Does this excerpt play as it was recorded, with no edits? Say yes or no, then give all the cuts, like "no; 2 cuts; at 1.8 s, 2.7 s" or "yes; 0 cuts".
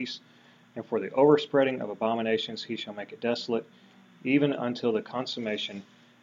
yes; 0 cuts